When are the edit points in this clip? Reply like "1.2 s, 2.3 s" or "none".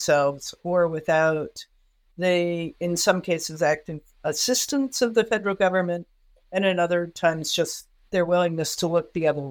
none